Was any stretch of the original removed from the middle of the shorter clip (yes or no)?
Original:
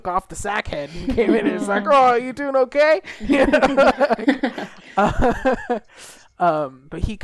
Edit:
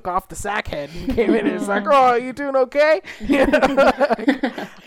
no